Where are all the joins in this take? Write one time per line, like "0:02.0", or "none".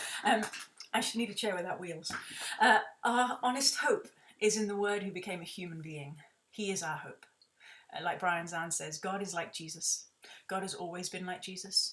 0:06.5